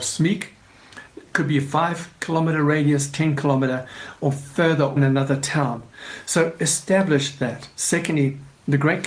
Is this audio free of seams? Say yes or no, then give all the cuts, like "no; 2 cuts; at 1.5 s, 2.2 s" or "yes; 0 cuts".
no; 1 cut; at 5.0 s